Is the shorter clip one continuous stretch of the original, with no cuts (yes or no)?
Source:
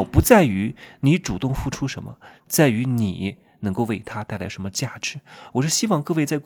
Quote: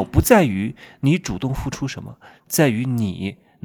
yes